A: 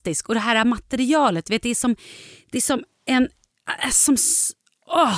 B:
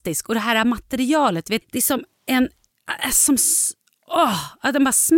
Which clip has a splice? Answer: B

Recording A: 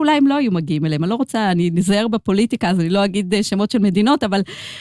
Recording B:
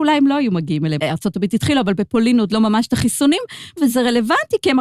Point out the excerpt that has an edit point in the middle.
B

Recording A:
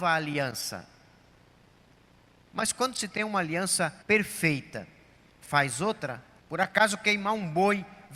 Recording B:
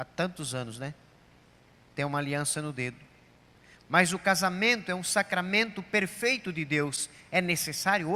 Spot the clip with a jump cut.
A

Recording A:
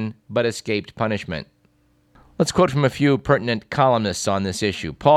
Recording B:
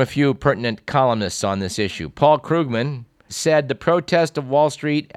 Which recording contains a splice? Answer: B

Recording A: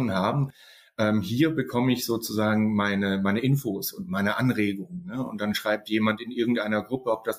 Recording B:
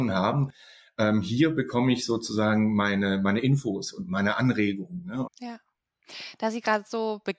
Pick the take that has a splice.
B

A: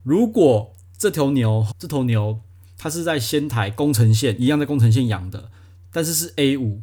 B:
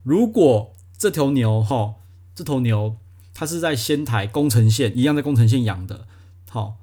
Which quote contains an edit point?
A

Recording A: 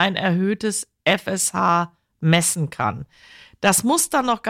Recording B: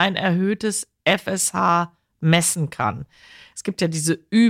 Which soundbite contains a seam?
B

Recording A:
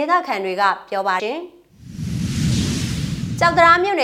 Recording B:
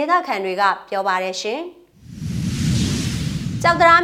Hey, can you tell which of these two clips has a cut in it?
A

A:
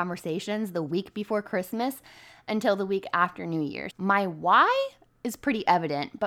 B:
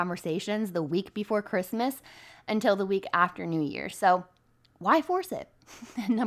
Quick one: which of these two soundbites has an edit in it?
A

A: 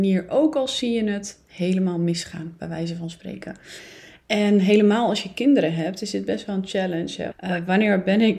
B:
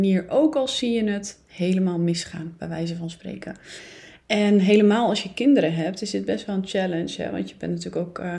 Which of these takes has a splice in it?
A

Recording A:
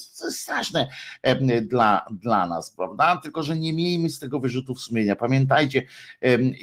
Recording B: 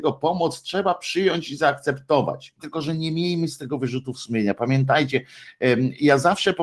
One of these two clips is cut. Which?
B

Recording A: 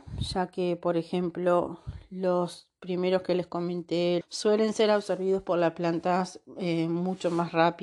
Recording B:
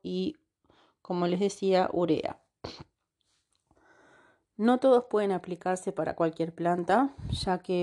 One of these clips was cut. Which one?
A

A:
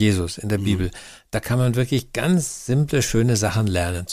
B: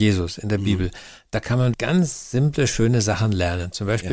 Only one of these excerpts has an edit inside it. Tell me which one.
B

